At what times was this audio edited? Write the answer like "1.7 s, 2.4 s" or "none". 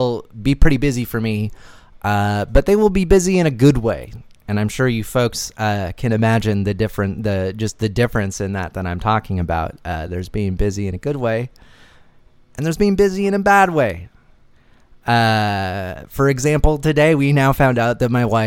none